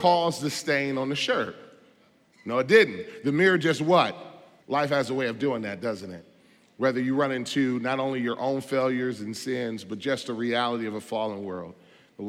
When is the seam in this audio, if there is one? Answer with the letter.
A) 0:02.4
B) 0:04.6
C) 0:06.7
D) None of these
B